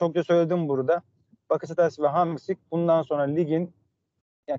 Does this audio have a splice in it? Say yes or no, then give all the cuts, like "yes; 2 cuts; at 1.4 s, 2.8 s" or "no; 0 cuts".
no; 0 cuts